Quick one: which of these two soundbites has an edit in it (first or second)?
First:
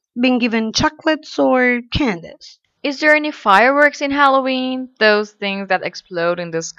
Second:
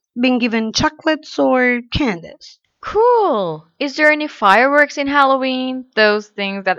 first